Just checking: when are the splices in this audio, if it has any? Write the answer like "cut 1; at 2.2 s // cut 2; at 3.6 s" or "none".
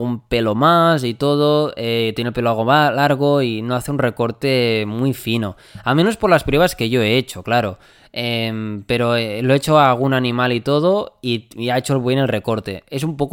none